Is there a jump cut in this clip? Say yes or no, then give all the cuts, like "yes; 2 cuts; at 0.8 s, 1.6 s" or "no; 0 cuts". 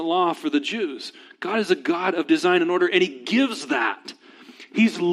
no; 0 cuts